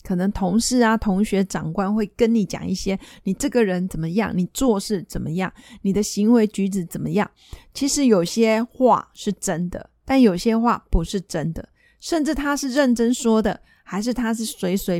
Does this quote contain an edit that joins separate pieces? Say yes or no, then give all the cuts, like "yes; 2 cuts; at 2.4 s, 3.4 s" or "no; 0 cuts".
no; 0 cuts